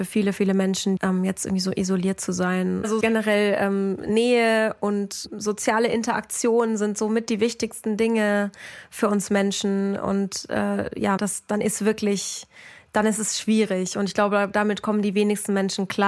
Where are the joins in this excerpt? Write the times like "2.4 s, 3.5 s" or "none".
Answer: 1.0 s, 3.0 s, 11.2 s